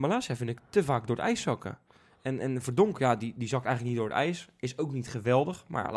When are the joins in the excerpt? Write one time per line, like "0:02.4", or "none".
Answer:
none